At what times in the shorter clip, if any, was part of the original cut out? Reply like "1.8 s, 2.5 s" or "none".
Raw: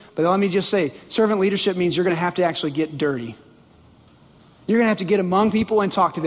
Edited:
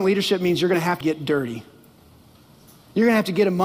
1.0 s